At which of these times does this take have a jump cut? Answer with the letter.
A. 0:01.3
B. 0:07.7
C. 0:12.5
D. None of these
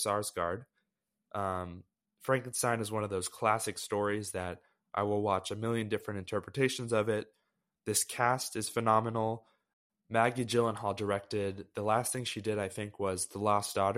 A